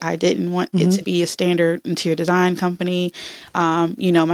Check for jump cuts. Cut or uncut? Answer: cut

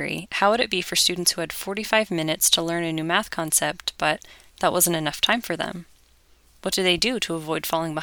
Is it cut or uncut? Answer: uncut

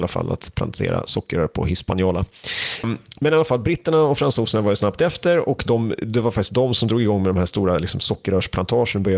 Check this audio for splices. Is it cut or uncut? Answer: cut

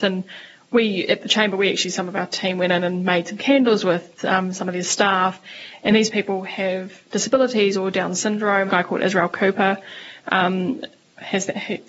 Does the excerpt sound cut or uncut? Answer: cut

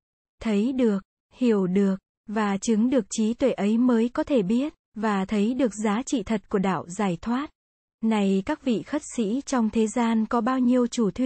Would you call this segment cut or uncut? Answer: cut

